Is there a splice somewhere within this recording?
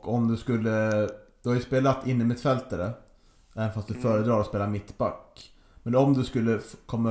no; 0 cuts

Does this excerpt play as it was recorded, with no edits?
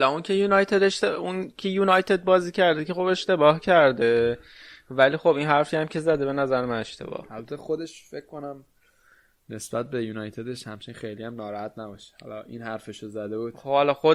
yes; 0 cuts

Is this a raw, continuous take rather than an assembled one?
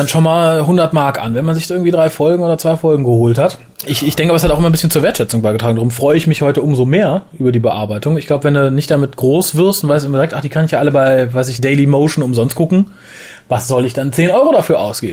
yes; 0 cuts

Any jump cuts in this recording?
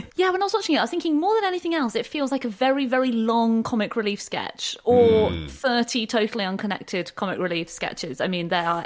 no; 0 cuts

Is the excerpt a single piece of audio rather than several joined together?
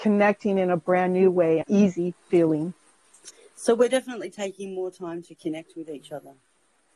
no; 1 cut; at 1.6 s

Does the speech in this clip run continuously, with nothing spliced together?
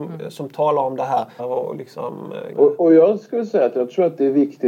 no; 2 cuts; at 1.4 s, 2.5 s

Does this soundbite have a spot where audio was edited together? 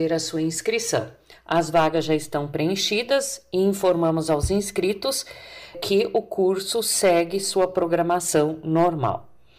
yes; 1 cut; at 1.3 s

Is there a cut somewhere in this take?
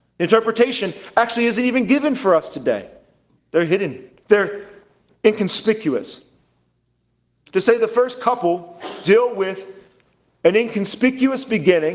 yes; 2 cuts; at 4.2 s, 7.5 s

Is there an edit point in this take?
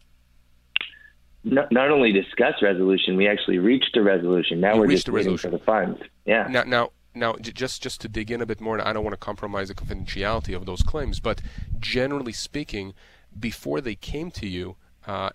no; 0 cuts

